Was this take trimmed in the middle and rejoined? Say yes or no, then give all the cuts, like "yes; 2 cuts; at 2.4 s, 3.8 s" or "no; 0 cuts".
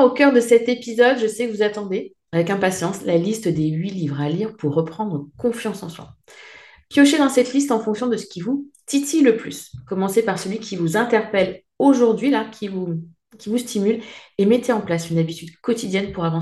no; 0 cuts